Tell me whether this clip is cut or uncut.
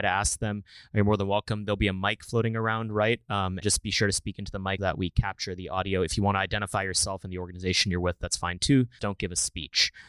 cut